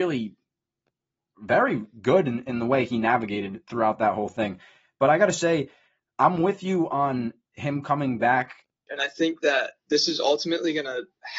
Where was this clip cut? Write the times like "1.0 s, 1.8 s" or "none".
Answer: 8.9 s